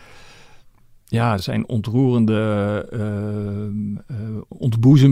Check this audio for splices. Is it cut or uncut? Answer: uncut